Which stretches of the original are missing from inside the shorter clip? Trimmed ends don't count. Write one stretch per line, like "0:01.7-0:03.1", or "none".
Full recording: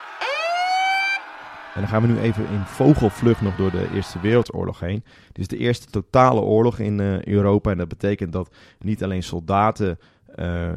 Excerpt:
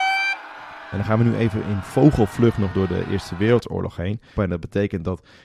0:05.2-0:07.6